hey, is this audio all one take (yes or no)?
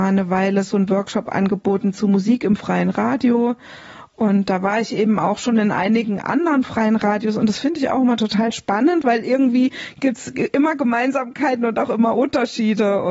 yes